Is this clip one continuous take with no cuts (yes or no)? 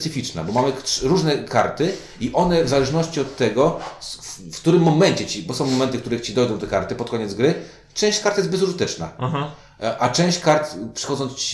yes